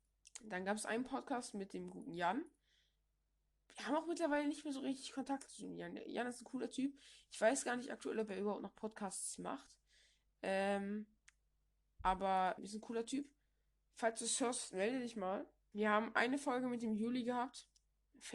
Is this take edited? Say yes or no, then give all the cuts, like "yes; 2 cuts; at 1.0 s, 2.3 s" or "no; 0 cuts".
yes; 2 cuts; at 12.6 s, 15.7 s